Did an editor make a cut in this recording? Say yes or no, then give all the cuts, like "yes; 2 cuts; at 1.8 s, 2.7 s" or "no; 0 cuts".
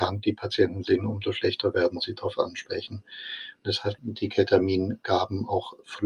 yes; 1 cut; at 4.0 s